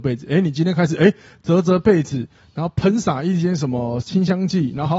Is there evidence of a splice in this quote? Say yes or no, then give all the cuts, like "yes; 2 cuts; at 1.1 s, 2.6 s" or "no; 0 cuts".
no; 0 cuts